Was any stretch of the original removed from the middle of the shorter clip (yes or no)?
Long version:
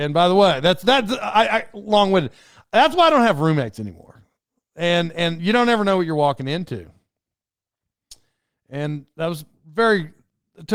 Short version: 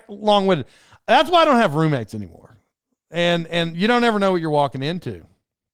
no